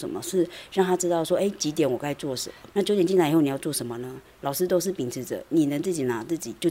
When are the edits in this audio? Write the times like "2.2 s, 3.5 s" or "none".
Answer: 2.7 s